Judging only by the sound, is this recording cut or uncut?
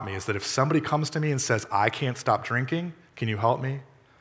uncut